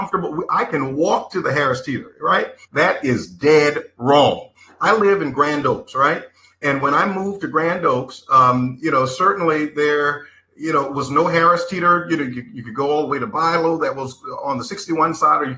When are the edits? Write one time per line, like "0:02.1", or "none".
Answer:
0:02.6